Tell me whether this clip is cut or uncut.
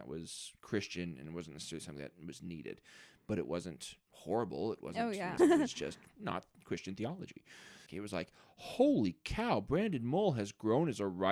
cut